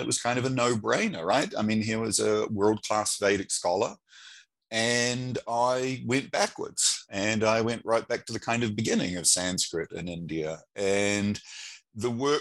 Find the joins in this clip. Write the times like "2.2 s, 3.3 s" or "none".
none